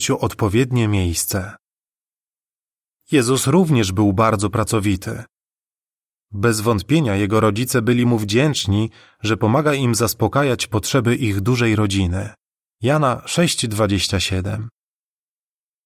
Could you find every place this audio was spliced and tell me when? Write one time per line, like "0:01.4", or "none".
0:06.2
0:12.7